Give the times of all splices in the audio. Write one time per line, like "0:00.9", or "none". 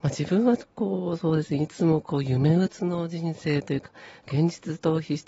0:02.7

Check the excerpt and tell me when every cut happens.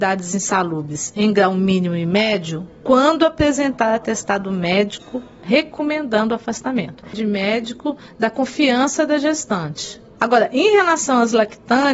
none

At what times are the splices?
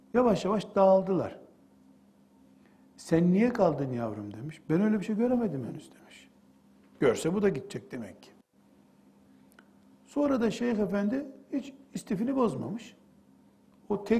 none

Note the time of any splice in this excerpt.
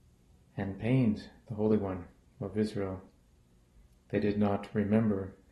none

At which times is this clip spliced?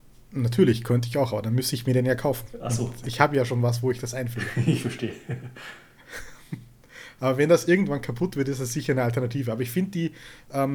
none

